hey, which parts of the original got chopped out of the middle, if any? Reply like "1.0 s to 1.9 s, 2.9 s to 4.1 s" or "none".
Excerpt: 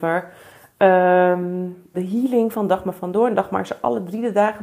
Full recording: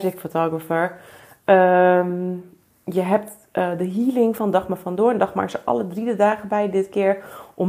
2.6 s to 3.8 s